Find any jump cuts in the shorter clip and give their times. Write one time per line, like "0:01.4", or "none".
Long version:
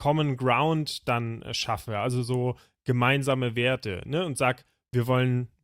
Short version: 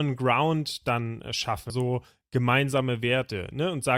0:01.7